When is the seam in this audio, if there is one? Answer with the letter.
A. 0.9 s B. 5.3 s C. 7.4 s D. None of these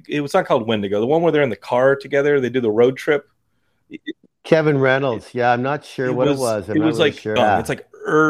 C